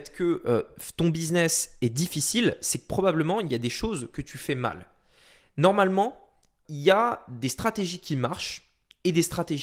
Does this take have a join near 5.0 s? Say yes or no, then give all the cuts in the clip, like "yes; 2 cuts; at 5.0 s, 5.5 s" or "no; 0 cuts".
no; 1 cut; at 6.7 s